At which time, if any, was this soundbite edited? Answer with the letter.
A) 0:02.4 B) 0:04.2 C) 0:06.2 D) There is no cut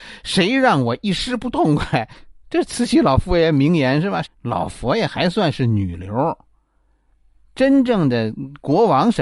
B